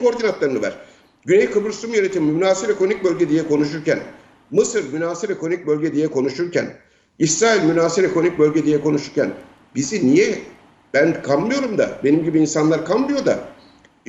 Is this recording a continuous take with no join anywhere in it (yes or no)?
yes